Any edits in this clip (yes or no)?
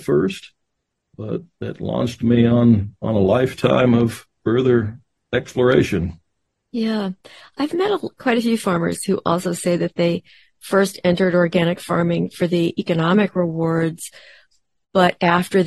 no